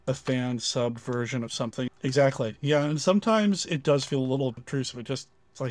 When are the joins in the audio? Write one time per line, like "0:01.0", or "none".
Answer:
0:01.9
0:04.6